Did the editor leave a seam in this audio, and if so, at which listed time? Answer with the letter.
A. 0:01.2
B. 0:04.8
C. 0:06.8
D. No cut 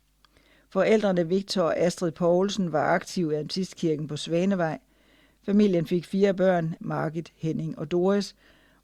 C